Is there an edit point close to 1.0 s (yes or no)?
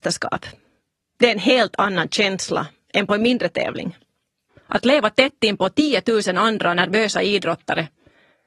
no